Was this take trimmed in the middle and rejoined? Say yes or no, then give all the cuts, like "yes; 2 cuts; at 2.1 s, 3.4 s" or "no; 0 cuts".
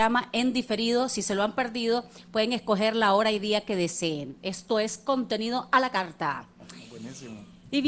no; 0 cuts